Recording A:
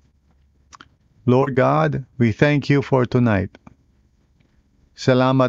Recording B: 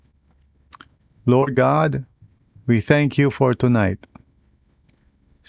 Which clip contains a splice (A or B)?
A